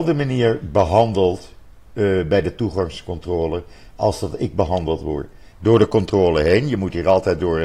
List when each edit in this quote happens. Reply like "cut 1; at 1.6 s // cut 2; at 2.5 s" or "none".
cut 1; at 5.5 s